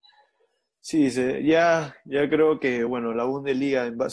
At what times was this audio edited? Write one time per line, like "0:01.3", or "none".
none